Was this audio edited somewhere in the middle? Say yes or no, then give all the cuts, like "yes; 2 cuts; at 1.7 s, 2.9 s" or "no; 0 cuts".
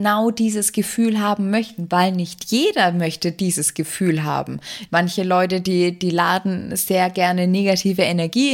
yes; 1 cut; at 4.9 s